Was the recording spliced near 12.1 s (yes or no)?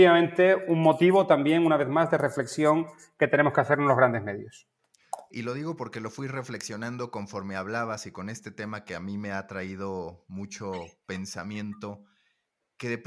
no